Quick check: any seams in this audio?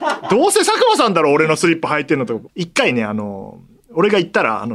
yes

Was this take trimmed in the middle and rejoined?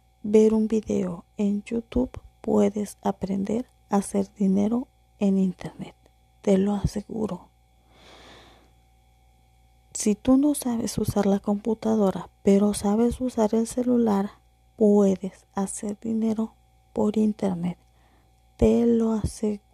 no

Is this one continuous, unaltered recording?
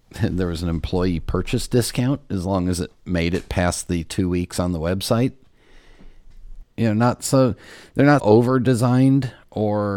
no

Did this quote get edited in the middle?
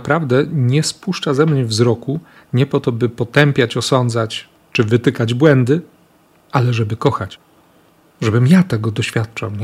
no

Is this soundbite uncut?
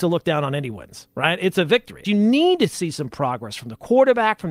no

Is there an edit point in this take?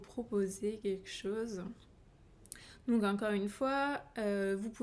no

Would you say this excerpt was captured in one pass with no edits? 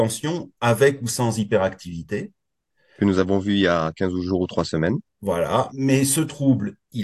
no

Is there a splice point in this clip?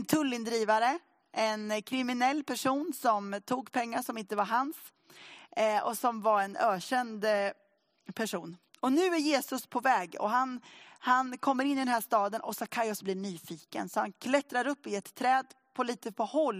no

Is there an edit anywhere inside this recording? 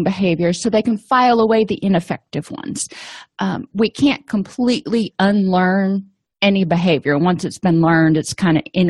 no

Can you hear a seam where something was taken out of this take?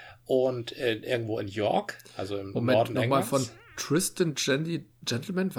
no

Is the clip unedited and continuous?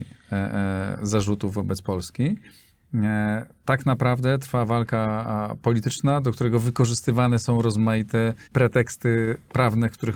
no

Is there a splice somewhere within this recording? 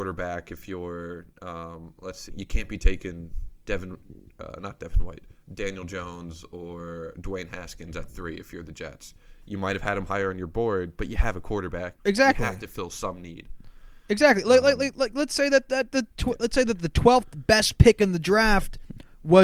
yes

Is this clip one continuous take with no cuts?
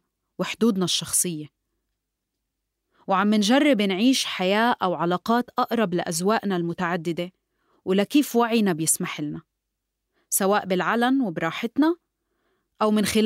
yes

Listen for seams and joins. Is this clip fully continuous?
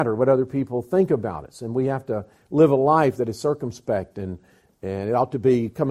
yes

